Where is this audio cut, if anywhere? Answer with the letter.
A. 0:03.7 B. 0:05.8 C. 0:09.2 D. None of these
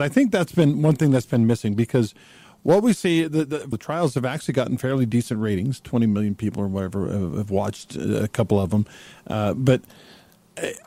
A